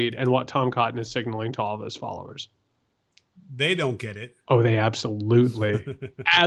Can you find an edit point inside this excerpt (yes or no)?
yes